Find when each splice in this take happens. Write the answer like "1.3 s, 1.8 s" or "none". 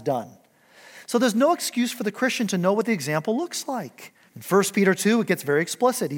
4.3 s